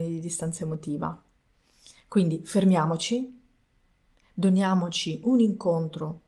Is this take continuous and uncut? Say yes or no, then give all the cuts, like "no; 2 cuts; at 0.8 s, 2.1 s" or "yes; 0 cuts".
yes; 0 cuts